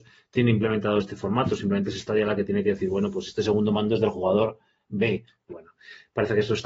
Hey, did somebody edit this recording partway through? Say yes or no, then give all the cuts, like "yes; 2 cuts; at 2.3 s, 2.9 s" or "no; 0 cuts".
yes; 1 cut; at 5.5 s